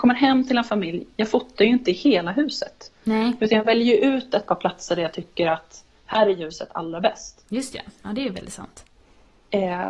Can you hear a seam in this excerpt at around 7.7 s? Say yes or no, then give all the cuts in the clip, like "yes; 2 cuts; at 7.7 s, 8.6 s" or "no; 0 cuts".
no; 0 cuts